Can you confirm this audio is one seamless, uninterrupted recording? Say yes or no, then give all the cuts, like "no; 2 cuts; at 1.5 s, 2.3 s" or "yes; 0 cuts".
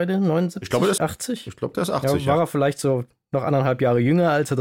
no; 1 cut; at 1.0 s